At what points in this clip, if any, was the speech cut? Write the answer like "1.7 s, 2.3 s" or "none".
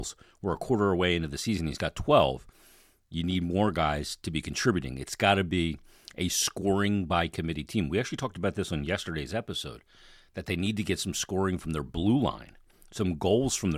none